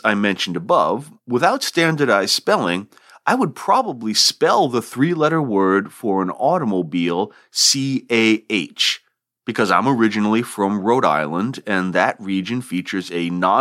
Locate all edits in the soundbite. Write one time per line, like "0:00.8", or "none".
none